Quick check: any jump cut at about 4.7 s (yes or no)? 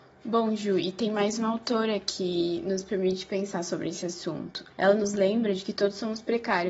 yes